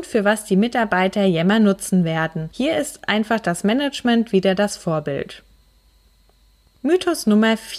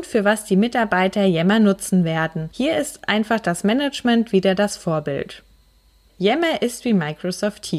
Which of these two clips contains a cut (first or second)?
second